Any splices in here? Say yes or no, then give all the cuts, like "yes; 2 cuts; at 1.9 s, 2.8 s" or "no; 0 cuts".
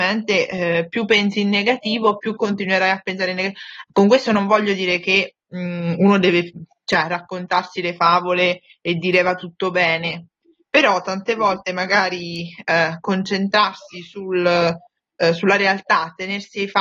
no; 0 cuts